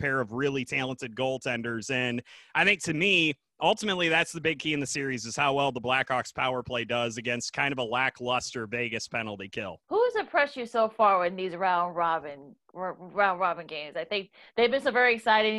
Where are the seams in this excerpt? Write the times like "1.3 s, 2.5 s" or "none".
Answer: 9.8 s